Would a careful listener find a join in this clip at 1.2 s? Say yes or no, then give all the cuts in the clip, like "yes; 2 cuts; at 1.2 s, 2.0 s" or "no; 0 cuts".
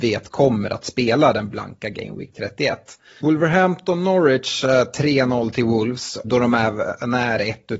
no; 2 cuts; at 3.2 s, 6.2 s